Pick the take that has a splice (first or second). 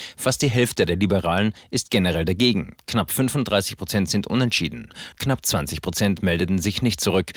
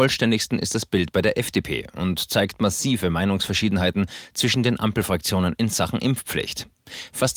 first